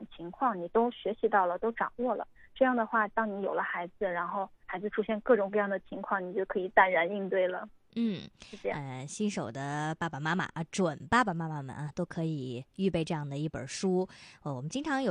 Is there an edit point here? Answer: no; 0 cuts

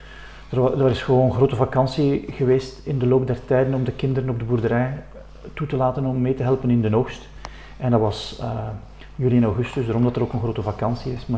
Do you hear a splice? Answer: no; 0 cuts

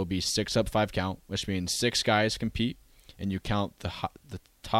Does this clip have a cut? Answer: no; 0 cuts

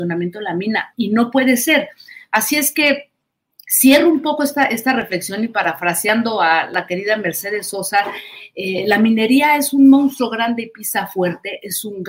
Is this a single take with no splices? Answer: no; 1 cut; at 0.9 s

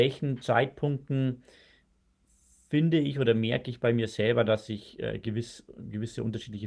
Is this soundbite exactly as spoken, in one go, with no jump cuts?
yes; 0 cuts

